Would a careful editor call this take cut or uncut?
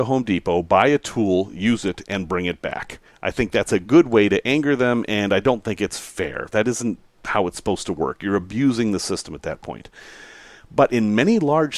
uncut